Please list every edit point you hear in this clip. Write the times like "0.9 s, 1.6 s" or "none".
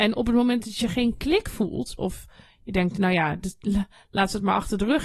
2.0 s